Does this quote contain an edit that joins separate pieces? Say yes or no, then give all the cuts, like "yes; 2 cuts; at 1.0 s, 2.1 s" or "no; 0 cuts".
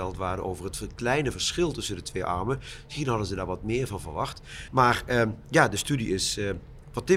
no; 0 cuts